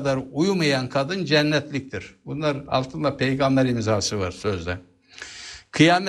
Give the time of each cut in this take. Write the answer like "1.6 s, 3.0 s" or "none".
none